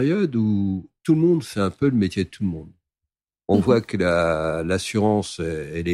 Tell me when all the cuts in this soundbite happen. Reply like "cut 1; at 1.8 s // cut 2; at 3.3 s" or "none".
none